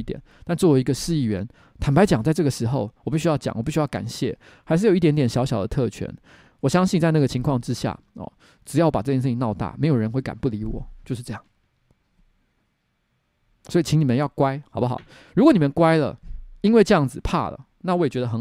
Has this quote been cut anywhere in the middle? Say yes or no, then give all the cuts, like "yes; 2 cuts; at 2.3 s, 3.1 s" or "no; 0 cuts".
no; 0 cuts